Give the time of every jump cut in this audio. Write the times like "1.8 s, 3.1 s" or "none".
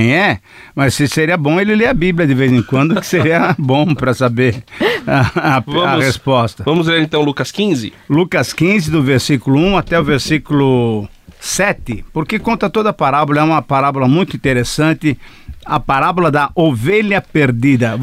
none